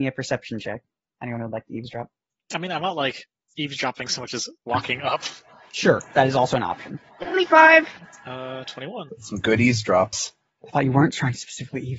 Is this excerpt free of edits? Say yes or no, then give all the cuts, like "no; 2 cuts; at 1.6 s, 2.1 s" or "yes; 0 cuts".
yes; 0 cuts